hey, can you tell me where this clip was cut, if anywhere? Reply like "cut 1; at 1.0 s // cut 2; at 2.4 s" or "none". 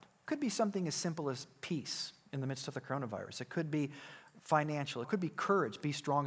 cut 1; at 5.0 s